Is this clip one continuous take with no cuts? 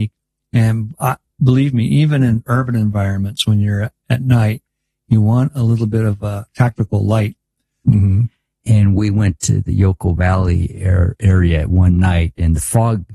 no; 1 cut; at 7.8 s

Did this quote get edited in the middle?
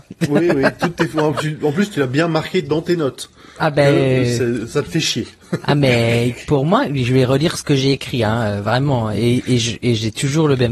no; 0 cuts

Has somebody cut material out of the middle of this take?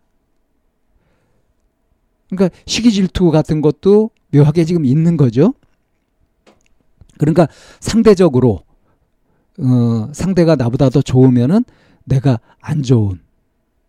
no; 0 cuts

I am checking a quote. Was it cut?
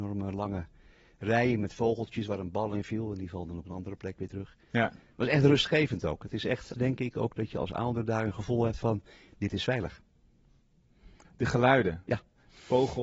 yes; 2 cuts; at 6.7 s, 11.2 s

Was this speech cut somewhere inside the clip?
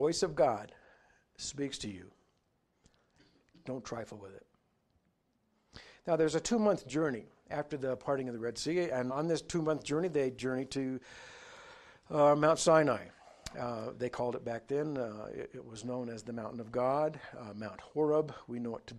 yes; 1 cut; at 9.1 s

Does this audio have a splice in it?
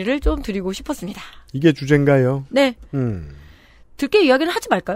no; 0 cuts

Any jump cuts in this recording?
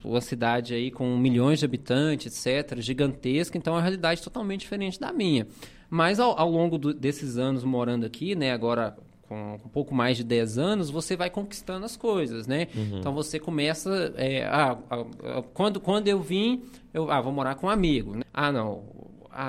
yes; 2 cuts; at 8.9 s, 18.2 s

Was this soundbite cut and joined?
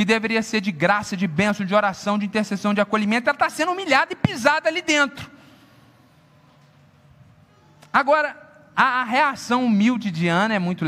no; 0 cuts

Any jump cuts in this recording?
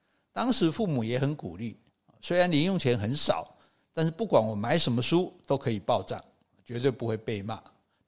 no; 0 cuts

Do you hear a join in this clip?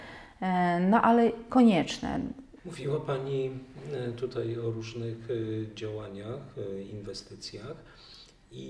yes; 1 cut; at 2.6 s

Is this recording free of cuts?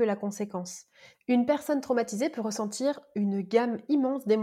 no; 1 cut; at 1.1 s

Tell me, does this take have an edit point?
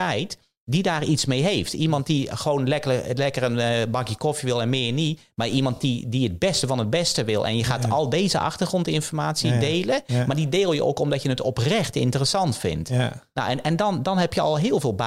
no; 0 cuts

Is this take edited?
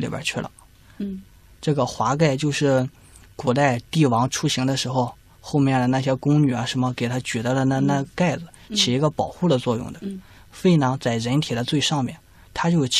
yes; 1 cut; at 1.0 s

